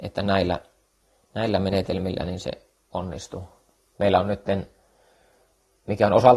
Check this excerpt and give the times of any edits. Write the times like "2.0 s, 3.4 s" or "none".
3.9 s